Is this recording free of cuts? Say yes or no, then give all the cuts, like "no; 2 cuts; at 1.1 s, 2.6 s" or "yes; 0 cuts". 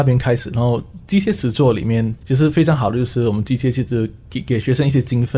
no; 1 cut; at 2.2 s